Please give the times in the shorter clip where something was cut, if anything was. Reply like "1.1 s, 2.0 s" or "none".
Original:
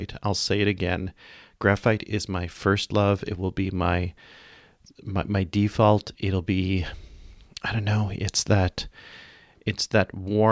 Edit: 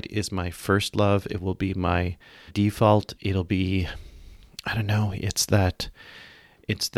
2.5 s